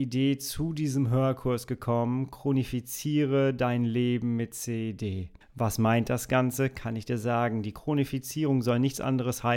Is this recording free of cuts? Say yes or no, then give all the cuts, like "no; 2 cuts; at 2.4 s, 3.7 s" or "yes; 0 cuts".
yes; 0 cuts